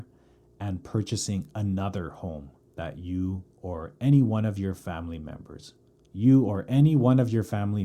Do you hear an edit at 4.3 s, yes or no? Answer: no